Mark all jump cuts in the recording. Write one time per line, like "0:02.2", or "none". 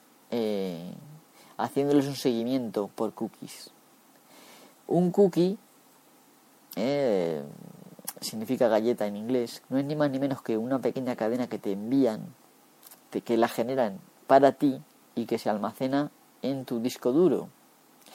0:09.6